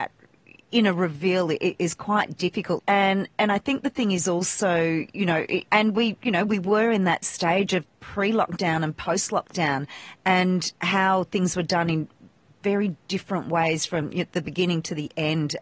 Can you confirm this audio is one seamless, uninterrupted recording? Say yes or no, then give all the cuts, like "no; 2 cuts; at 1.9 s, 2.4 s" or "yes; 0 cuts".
no; 3 cuts; at 2.8 s, 5.7 s, 7.8 s